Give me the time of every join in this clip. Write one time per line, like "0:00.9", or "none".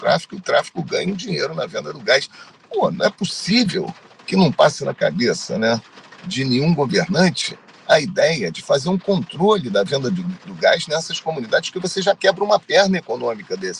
none